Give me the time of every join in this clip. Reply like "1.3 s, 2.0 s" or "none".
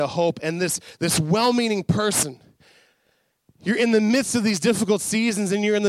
none